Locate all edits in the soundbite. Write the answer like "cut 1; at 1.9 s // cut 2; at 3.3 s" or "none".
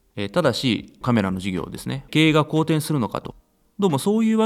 cut 1; at 1.0 s // cut 2; at 2.1 s